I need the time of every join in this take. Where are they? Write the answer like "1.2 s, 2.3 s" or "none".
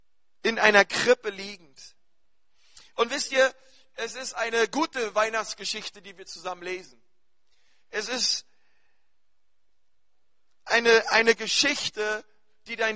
none